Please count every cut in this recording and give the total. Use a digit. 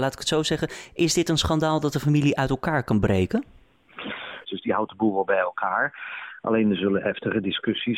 1